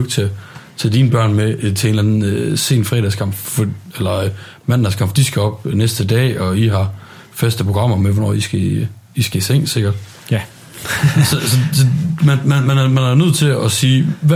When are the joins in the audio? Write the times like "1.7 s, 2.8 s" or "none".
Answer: none